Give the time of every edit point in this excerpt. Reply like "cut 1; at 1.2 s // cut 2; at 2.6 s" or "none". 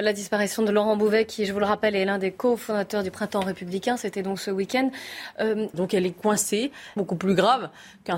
cut 1; at 5.7 s // cut 2; at 7.0 s